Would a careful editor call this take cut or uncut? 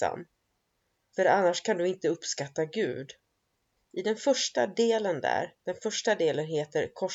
cut